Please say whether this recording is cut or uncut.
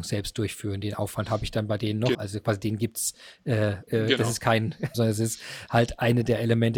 cut